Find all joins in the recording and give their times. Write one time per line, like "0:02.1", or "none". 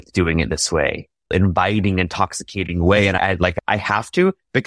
0:01.3